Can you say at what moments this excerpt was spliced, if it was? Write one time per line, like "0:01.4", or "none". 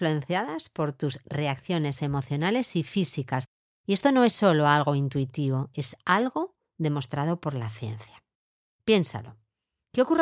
none